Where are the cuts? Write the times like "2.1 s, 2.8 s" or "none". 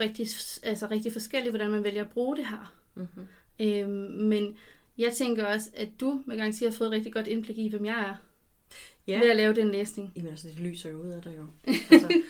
none